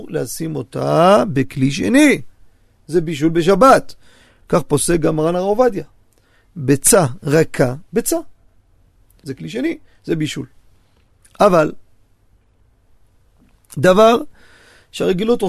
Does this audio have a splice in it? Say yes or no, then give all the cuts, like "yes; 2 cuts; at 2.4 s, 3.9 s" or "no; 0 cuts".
yes; 1 cut; at 9.2 s